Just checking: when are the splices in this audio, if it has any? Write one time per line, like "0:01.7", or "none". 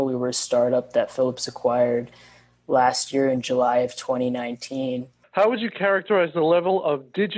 0:05.2